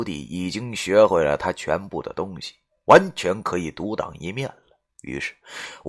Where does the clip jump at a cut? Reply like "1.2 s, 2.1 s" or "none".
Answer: 4.9 s